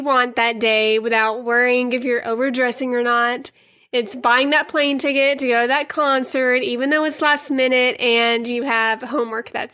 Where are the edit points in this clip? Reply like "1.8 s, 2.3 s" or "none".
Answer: none